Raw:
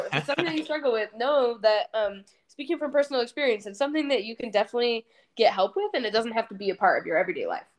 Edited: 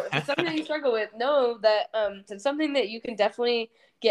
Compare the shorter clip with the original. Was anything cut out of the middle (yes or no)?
yes